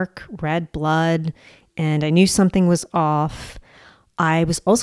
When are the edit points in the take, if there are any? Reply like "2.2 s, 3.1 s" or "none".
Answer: none